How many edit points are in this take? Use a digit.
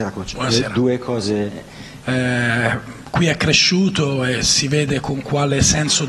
1